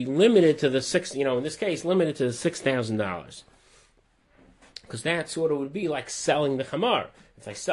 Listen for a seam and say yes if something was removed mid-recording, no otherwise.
no